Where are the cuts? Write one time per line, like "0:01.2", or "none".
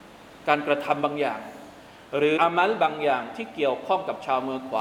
0:02.4